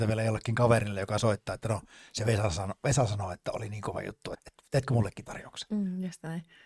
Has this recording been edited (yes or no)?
yes